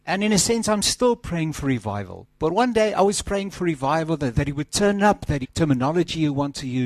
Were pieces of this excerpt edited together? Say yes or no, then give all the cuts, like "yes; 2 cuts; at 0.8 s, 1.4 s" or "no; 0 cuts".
yes; 2 cuts; at 4.3 s, 5.4 s